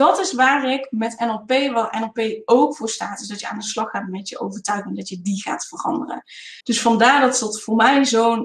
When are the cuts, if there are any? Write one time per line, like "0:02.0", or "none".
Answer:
0:06.6